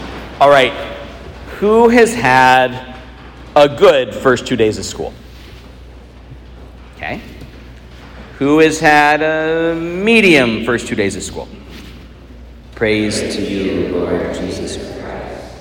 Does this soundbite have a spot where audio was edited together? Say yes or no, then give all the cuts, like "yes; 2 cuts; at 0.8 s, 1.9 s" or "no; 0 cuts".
yes; 1 cut; at 12.6 s